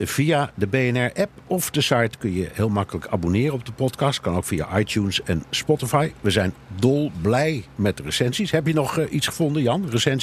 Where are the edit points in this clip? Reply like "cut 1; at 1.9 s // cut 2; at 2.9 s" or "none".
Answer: none